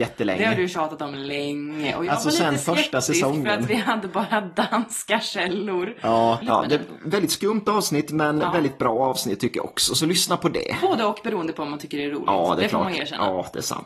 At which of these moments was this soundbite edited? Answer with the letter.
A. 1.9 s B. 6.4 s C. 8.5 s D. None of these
B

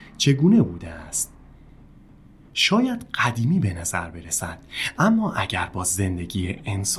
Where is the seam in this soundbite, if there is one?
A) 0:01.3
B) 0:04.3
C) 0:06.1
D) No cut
D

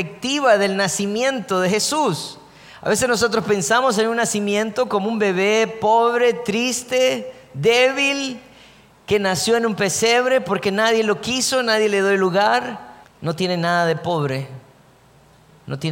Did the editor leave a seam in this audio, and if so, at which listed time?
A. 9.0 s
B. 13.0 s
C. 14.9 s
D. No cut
B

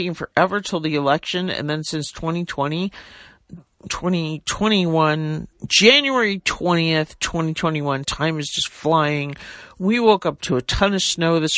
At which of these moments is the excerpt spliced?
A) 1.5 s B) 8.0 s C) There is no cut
B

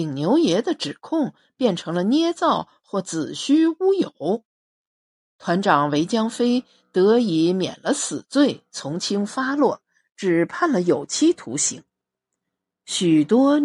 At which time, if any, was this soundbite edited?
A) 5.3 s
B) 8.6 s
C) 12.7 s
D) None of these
D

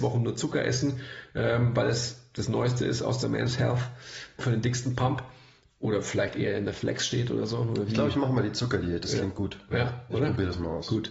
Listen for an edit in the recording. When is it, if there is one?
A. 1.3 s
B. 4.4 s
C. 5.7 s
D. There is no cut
B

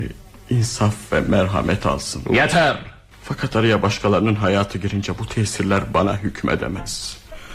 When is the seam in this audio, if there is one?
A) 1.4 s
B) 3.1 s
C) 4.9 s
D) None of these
B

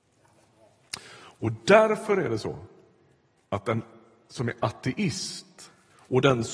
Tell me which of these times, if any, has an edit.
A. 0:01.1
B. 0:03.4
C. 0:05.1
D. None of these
D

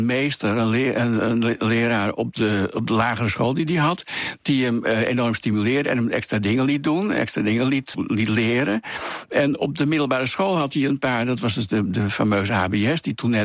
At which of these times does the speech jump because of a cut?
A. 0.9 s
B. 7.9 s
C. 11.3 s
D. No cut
B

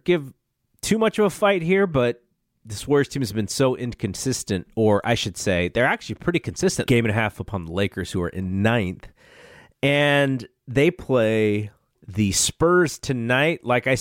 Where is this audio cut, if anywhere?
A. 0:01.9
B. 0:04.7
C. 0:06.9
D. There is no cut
C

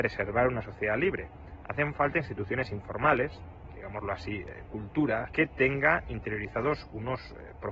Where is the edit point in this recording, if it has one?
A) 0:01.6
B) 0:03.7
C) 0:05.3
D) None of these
C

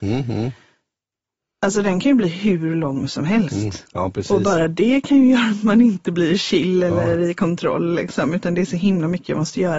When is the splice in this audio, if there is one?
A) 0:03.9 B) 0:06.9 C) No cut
A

